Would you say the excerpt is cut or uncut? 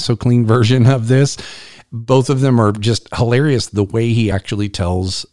uncut